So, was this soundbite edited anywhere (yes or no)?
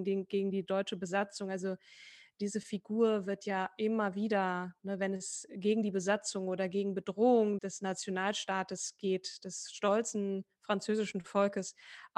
yes